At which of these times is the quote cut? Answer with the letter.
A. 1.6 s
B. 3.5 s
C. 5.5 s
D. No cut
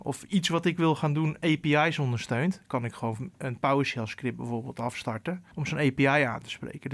C